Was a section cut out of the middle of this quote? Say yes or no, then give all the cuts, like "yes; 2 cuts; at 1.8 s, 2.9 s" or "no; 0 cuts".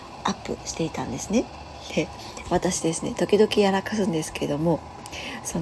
no; 0 cuts